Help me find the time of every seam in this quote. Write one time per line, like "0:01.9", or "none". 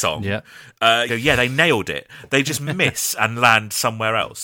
0:01.1
0:02.3

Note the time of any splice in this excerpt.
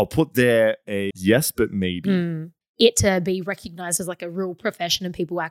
0:01.1
0:02.6

